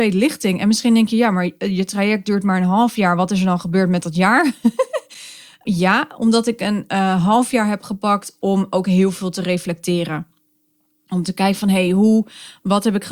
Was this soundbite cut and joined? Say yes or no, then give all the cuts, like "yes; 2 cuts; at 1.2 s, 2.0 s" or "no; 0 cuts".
no; 0 cuts